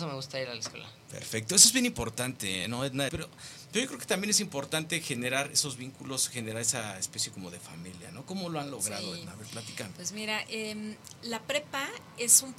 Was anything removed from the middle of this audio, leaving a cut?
yes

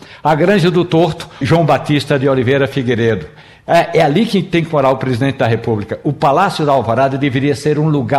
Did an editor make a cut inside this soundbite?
yes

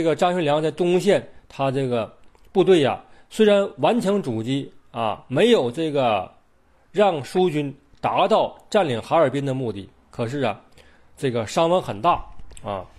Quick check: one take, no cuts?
yes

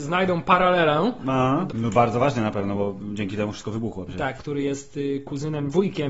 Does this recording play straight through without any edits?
no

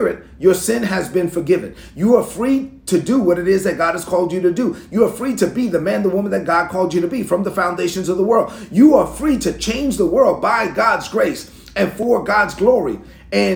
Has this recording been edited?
no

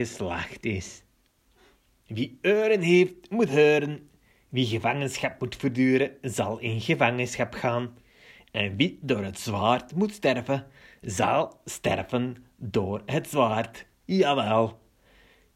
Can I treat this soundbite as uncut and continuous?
yes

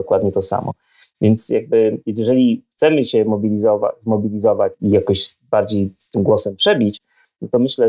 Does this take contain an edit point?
no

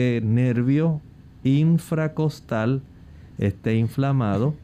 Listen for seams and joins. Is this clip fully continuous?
yes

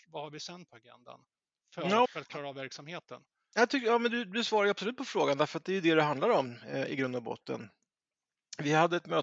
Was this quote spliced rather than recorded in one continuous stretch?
yes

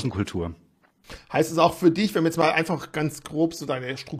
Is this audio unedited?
yes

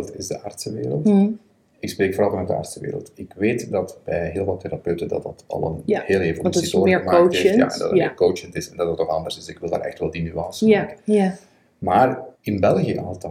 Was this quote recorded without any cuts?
no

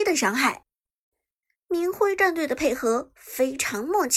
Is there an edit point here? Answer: yes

